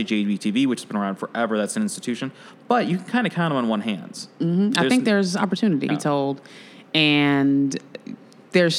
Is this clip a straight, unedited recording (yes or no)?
no